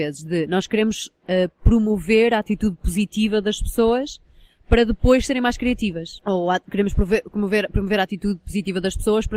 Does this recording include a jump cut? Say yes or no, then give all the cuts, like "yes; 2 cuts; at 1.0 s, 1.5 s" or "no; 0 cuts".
yes; 1 cut; at 6.2 s